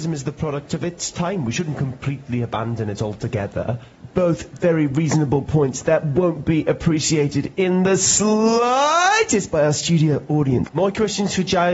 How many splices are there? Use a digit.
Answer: 1